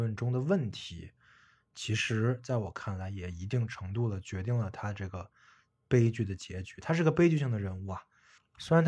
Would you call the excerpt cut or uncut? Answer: uncut